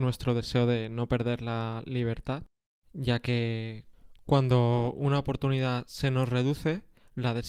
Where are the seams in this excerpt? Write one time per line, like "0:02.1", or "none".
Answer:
0:02.8